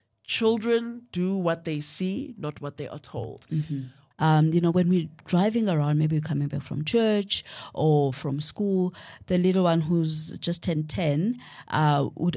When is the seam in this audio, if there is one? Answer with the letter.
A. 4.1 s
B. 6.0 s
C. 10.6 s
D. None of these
A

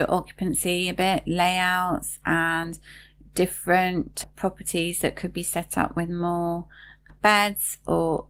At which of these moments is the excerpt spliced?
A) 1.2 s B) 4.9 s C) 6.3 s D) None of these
A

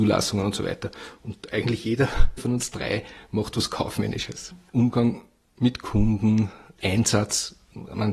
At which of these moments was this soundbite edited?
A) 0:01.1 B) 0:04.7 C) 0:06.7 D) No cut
B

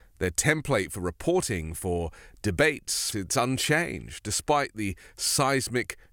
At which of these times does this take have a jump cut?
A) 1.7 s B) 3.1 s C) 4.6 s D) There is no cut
B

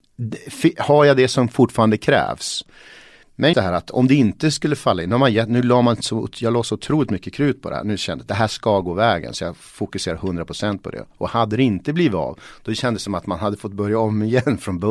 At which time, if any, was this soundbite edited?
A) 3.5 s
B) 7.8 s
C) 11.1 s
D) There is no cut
A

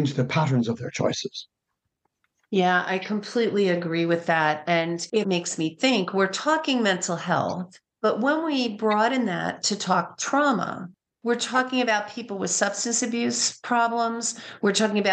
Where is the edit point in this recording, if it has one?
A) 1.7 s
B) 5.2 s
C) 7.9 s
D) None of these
B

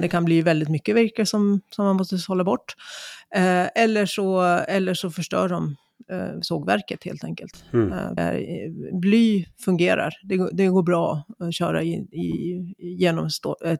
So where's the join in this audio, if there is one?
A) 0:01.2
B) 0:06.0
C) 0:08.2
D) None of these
C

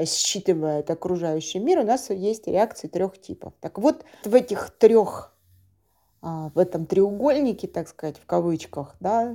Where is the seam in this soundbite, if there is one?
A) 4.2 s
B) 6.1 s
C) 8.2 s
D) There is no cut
A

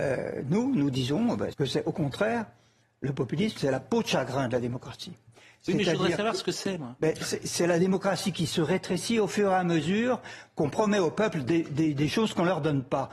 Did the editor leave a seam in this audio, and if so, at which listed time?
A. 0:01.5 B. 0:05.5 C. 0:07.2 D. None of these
A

